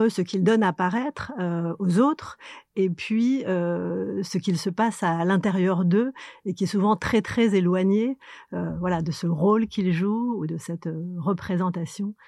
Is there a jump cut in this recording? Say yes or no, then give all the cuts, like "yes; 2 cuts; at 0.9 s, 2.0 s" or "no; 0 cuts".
no; 0 cuts